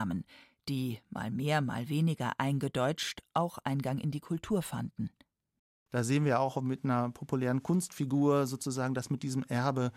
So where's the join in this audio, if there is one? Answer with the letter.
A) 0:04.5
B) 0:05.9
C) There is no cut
B